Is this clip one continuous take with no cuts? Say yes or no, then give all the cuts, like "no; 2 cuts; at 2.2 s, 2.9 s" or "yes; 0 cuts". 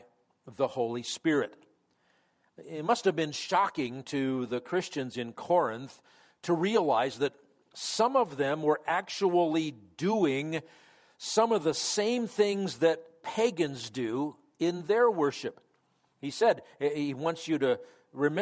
yes; 0 cuts